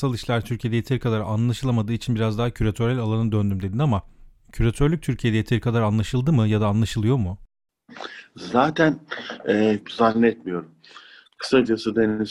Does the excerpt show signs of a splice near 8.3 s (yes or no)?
no